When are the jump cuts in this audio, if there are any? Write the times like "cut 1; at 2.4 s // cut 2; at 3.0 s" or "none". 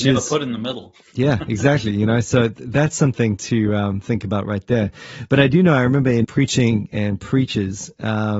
cut 1; at 6.2 s